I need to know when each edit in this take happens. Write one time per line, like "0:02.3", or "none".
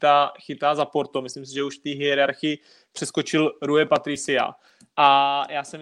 none